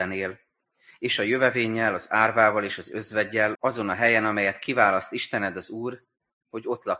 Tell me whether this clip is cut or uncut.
cut